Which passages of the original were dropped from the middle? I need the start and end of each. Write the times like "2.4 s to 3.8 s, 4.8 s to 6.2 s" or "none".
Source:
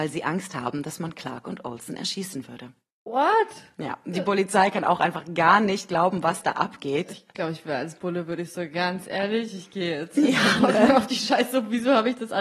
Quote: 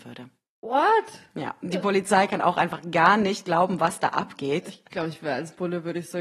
none